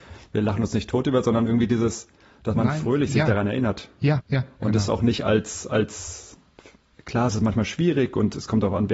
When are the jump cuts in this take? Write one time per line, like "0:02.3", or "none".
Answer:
0:04.2